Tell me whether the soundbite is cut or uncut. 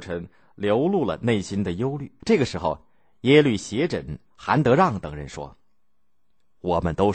cut